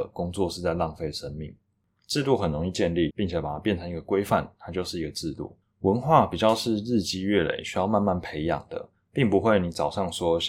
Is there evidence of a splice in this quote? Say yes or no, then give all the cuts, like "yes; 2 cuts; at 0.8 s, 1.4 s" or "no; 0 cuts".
yes; 1 cut; at 3.1 s